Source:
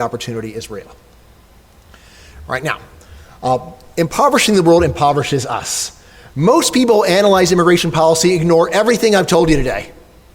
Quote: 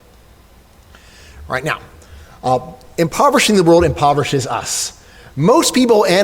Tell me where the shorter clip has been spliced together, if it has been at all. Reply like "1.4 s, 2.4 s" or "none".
none